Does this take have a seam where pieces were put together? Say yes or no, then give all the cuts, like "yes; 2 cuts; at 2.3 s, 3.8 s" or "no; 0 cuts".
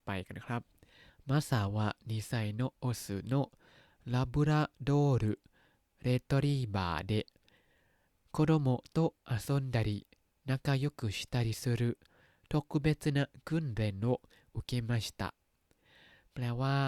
no; 0 cuts